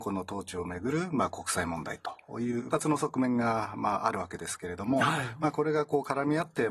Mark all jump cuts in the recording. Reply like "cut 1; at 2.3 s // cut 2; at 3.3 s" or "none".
cut 1; at 2.7 s